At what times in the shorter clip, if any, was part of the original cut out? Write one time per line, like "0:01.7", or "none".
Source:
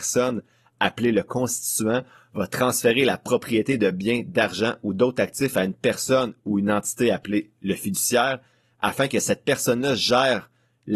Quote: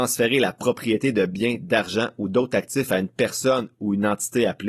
none